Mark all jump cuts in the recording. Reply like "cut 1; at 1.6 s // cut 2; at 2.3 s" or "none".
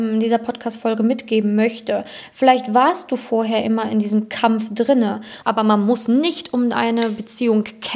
cut 1; at 5.4 s